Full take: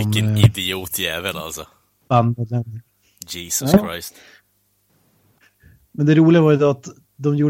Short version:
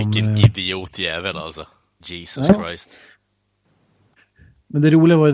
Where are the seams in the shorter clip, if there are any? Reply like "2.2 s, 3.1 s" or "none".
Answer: 2.0 s